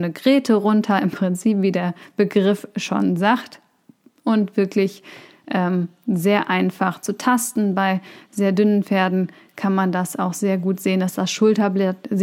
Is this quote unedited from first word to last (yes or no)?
yes